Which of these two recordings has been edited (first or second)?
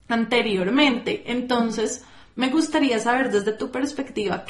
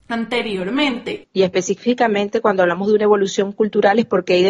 second